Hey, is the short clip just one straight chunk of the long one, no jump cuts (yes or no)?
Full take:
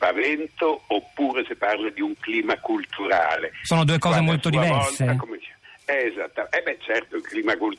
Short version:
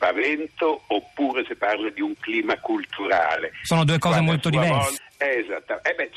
no